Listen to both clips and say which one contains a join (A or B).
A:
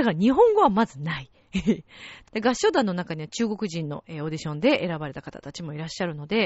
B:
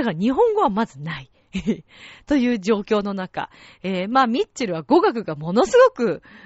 A